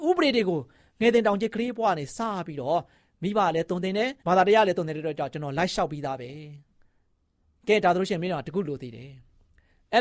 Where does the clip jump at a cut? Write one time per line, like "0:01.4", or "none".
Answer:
0:04.2

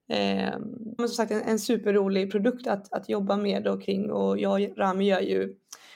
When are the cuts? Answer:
0:01.0

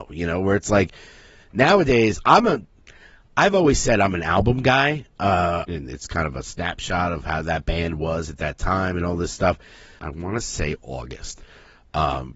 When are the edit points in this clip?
0:05.7
0:10.0

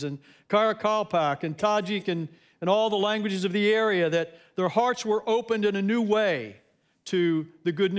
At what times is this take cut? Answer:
none

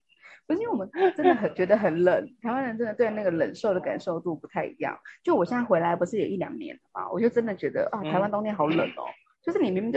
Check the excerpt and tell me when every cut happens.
none

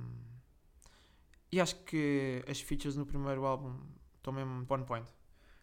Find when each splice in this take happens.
0:04.7

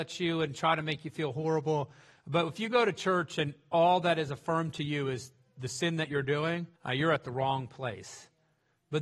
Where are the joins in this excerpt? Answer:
0:06.7

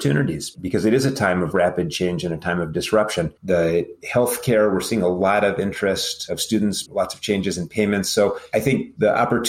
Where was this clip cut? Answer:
0:03.4
0:06.9

